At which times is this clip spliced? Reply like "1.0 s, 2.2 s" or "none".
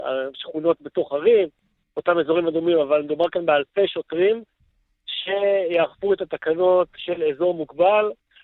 none